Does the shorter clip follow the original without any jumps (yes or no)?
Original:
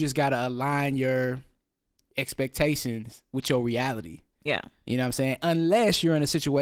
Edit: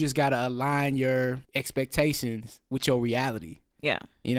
no